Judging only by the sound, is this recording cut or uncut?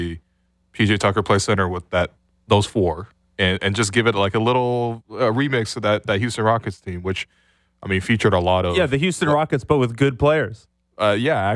uncut